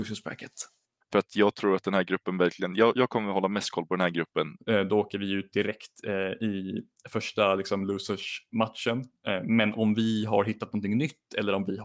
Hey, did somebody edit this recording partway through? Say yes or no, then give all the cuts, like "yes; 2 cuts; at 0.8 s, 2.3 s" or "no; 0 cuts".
yes; 2 cuts; at 1.0 s, 4.6 s